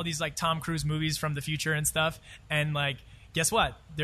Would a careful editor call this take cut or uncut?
uncut